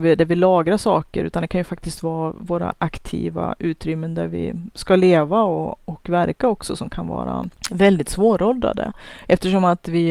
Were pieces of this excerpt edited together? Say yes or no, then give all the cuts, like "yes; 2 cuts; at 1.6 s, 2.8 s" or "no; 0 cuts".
no; 0 cuts